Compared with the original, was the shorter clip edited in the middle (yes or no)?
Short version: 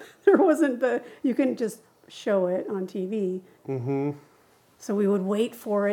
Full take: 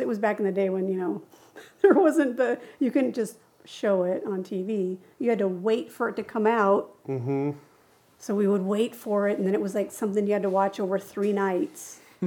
yes